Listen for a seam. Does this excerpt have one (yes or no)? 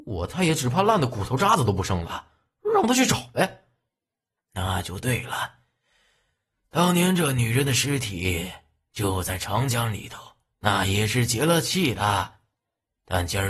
yes